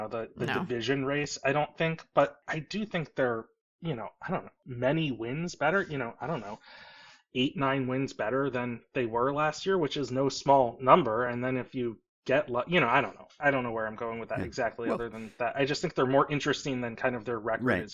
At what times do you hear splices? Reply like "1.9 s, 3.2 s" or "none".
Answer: none

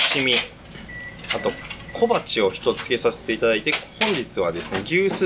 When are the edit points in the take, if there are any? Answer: 2.8 s

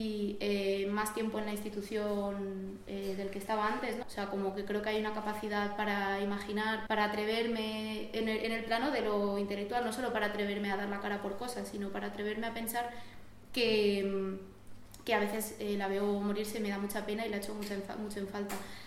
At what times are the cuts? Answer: 4.0 s, 6.9 s

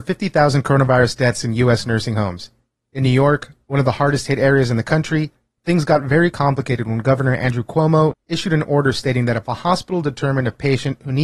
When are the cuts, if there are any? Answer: 8.1 s

